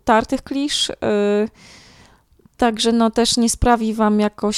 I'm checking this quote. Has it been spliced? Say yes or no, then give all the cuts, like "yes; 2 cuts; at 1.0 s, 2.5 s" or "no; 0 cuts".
no; 0 cuts